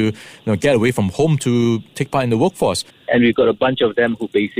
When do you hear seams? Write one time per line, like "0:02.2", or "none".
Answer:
0:02.9